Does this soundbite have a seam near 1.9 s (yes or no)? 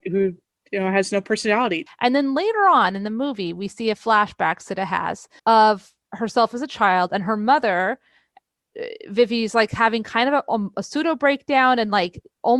yes